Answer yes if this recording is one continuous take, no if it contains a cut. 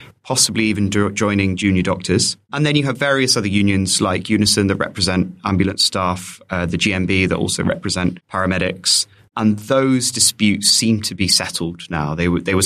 yes